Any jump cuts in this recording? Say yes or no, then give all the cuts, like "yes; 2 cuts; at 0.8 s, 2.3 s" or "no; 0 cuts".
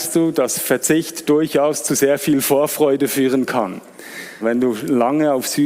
yes; 1 cut; at 4.4 s